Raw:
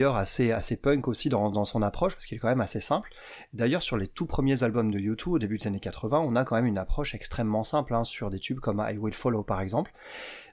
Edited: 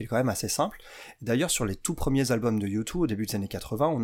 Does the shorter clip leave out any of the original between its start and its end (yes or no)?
no